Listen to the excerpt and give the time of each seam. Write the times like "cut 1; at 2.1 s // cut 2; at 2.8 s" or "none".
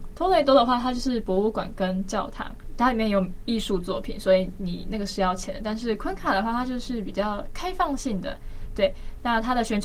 none